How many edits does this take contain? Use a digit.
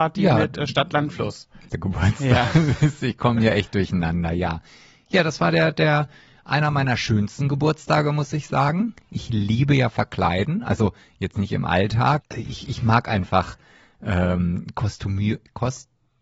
2